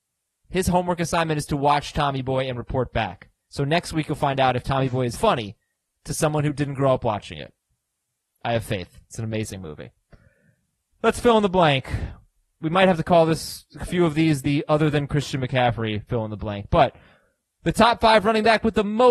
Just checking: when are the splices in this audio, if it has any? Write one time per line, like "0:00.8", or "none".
0:05.1